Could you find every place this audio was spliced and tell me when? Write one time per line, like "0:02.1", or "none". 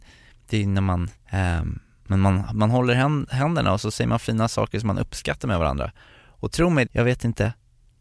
0:01.1
0:06.9